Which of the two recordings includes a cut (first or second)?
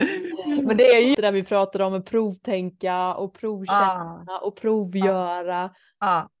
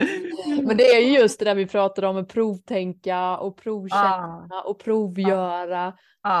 first